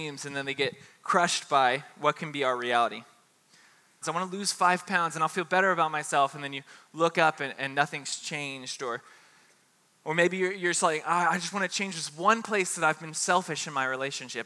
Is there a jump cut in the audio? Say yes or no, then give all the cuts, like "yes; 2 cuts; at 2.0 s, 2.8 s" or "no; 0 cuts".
yes; 1 cut; at 4.0 s